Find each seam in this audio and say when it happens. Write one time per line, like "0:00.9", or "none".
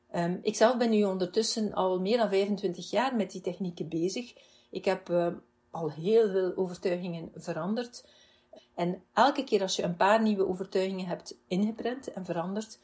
0:08.6